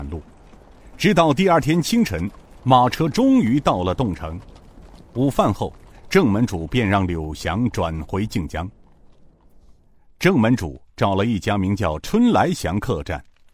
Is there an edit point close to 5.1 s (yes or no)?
no